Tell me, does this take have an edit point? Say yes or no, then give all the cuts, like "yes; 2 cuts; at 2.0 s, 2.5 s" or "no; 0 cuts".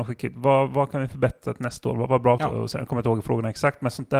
yes; 1 cut; at 2.4 s